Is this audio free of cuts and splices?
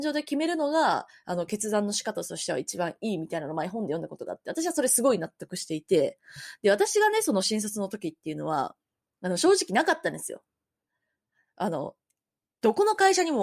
yes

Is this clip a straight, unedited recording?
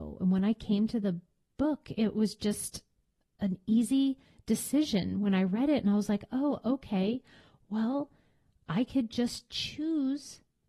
yes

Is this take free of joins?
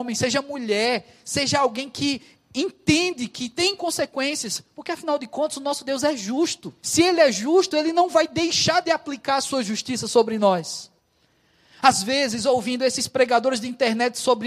no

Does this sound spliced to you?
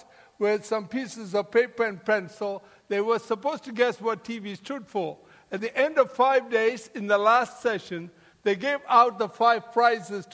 no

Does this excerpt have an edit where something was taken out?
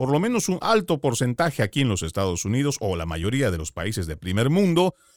no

